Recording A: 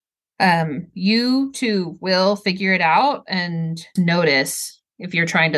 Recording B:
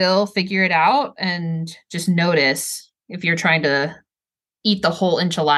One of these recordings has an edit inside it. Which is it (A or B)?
A